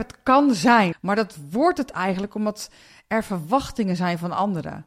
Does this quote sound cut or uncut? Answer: cut